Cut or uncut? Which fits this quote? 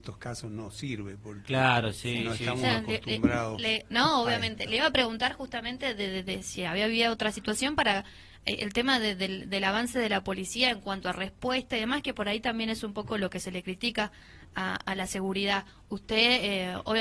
uncut